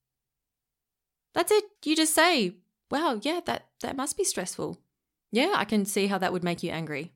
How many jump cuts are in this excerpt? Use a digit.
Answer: 2